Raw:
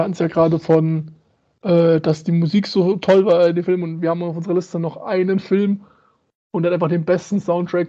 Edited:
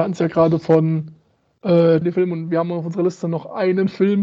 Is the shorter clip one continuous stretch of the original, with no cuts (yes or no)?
no